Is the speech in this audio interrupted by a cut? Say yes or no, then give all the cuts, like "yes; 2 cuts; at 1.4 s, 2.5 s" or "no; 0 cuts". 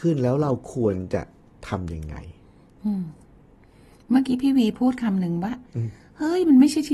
no; 0 cuts